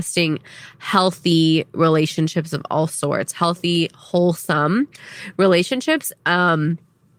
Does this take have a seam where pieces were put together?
no; 0 cuts

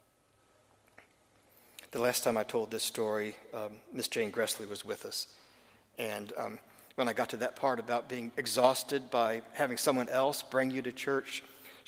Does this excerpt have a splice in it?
no; 0 cuts

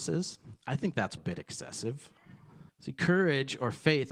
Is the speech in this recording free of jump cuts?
no; 2 cuts; at 1.2 s, 2.7 s

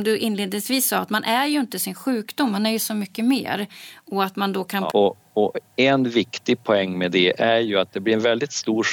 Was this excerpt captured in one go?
no; 1 cut; at 4.9 s

